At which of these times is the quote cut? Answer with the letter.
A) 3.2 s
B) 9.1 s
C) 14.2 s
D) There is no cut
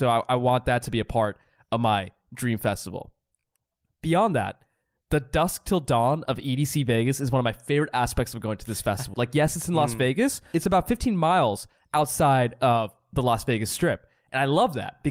B